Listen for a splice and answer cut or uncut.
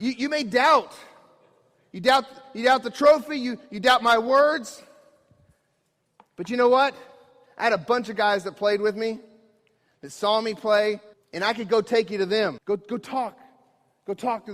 cut